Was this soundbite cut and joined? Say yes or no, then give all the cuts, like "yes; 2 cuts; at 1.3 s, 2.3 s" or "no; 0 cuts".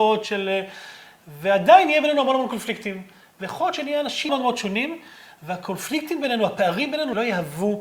yes; 1 cut; at 4.3 s